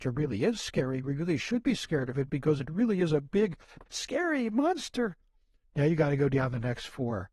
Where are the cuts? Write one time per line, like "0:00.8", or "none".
0:03.9
0:05.6